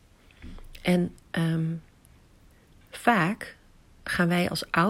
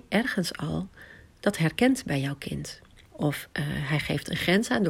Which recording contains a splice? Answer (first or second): second